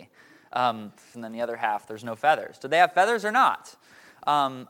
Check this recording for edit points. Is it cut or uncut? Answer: cut